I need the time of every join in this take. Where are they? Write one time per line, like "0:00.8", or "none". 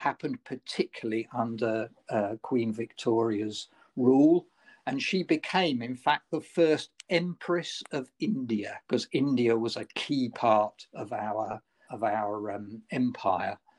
0:08.8
0:11.9